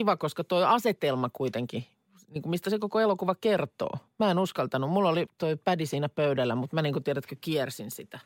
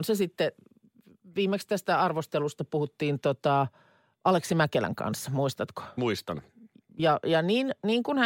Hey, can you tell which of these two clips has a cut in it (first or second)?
first